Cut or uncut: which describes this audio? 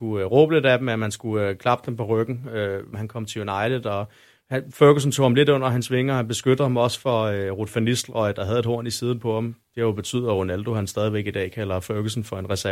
cut